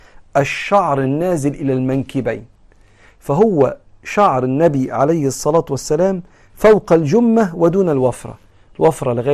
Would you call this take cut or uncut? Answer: uncut